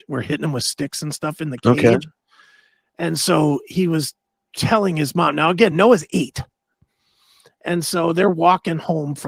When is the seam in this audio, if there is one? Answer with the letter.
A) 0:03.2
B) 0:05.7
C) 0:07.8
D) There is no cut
D